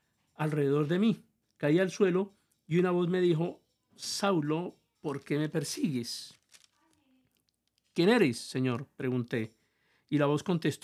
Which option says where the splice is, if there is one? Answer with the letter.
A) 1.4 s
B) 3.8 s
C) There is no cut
C